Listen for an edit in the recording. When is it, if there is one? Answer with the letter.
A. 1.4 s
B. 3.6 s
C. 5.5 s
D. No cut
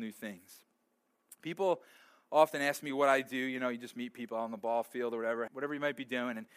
C